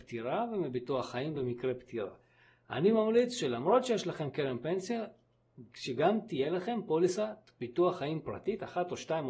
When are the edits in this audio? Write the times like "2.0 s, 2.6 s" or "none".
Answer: none